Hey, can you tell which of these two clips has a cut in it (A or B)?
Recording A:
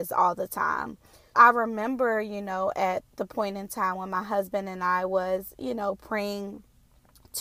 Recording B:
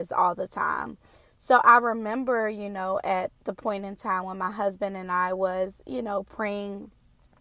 A